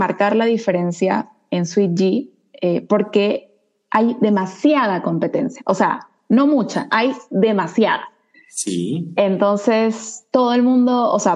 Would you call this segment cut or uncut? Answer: uncut